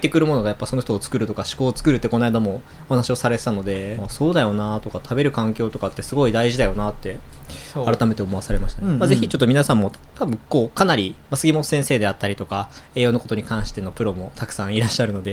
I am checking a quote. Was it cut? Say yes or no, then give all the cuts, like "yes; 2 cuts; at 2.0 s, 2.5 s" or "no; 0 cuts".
yes; 2 cuts; at 4.0 s, 11.2 s